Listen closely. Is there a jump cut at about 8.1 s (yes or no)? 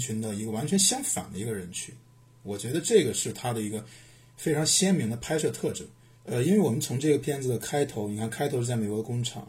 no